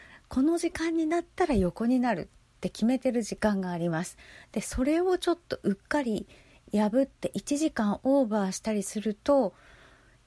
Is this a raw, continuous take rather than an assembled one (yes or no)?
yes